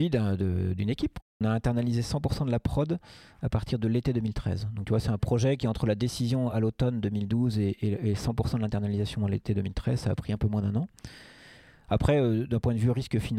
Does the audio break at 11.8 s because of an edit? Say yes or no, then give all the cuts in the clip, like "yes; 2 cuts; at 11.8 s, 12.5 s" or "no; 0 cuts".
no; 0 cuts